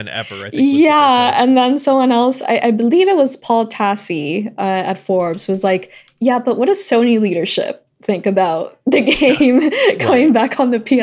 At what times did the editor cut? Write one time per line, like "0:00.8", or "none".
none